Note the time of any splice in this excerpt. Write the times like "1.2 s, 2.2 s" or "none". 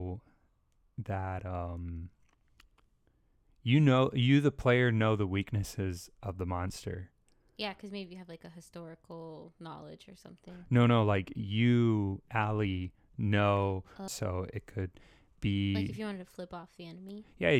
14.1 s